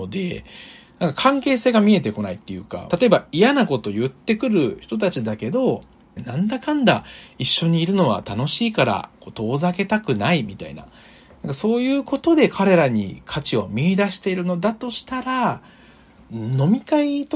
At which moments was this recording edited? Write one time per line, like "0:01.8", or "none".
0:02.9
0:06.2